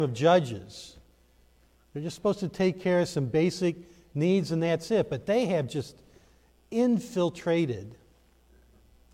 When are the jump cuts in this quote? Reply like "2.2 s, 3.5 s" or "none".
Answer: none